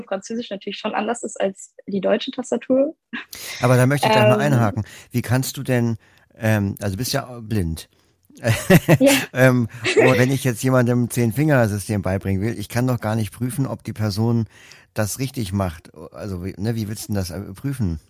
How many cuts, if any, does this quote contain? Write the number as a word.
one